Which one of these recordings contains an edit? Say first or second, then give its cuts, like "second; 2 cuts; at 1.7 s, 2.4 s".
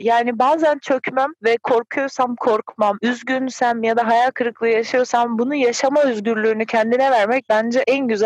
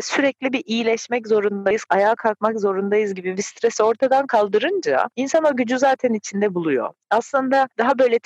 first; 1 cut; at 3.0 s